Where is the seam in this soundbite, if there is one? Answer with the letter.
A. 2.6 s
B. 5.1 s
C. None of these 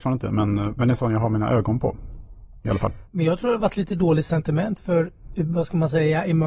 C